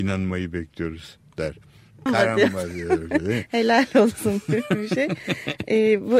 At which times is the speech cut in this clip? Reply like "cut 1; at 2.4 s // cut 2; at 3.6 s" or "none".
cut 1; at 2.1 s